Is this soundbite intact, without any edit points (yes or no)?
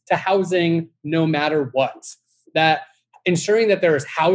no